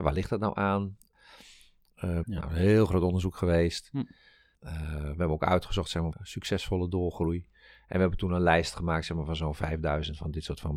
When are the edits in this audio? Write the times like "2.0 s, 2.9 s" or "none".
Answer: 2.2 s, 6.1 s